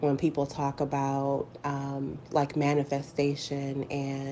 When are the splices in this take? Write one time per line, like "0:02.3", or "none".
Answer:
none

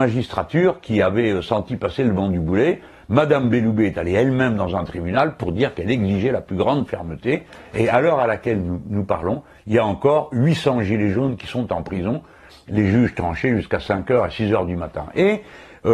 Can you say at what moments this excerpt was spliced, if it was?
0:12.5

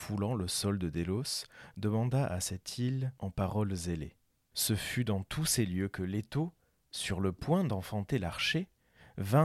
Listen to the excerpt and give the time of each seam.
0:04.5

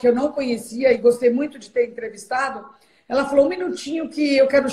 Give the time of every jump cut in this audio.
none

